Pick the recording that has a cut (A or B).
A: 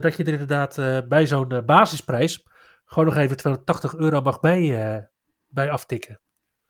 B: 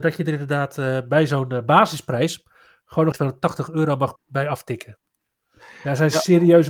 B